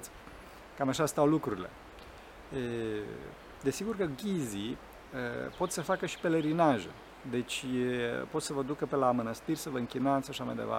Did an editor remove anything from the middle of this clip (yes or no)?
no